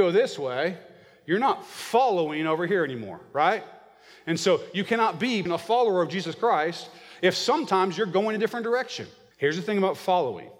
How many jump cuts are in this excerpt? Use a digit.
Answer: 2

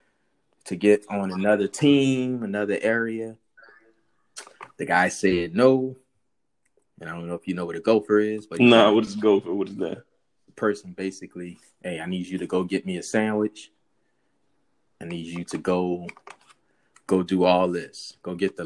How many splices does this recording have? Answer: 1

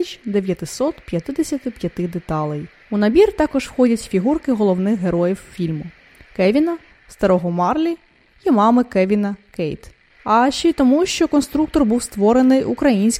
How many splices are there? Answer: 3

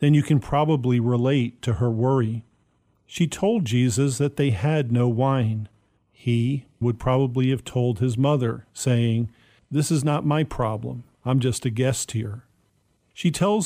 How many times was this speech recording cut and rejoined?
1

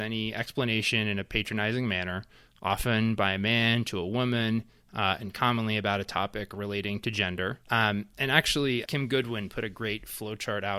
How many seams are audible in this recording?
2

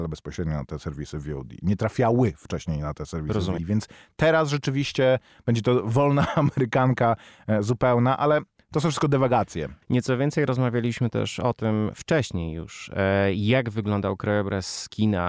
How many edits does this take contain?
2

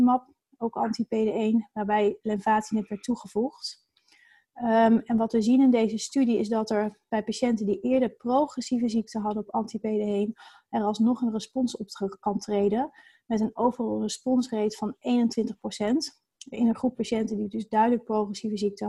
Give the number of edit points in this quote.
0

